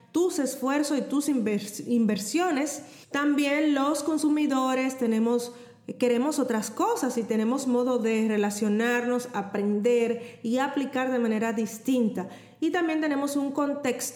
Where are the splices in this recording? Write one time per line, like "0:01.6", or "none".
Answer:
0:03.0